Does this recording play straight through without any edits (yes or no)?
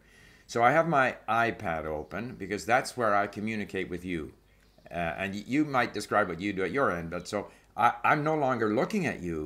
yes